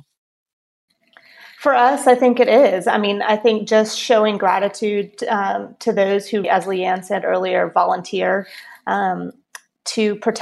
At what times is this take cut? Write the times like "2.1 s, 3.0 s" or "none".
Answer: 6.4 s